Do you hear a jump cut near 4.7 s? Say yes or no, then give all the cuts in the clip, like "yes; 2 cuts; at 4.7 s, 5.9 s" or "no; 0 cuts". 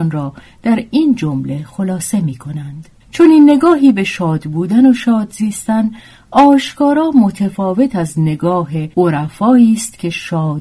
no; 2 cuts; at 3.0 s, 8.9 s